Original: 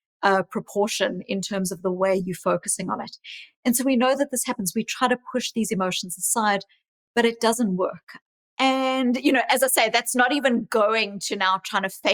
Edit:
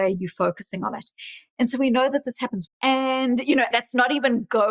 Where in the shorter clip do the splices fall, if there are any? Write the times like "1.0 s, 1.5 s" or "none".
2.7 s, 3.7 s